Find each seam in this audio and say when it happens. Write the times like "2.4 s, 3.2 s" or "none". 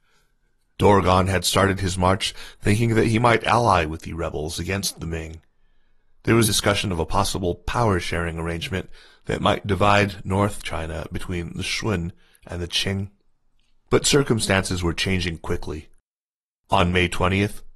6.5 s